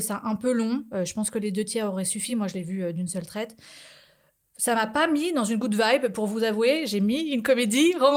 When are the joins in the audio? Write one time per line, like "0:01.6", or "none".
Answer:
none